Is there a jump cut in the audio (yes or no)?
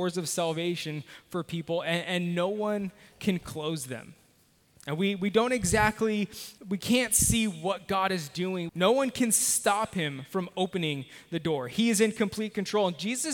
yes